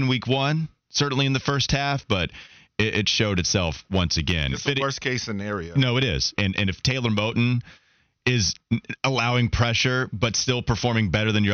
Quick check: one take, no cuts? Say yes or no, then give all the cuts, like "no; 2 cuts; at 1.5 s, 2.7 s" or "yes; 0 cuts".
no; 1 cut; at 6.4 s